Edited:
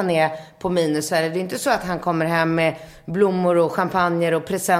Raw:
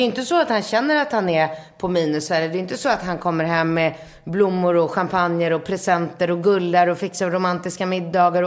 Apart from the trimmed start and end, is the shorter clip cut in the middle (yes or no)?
no